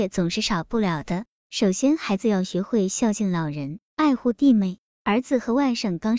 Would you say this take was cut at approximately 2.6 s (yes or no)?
no